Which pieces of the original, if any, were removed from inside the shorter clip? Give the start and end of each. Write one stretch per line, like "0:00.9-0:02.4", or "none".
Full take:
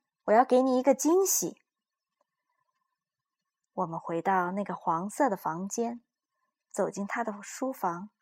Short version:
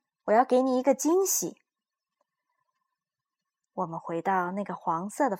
none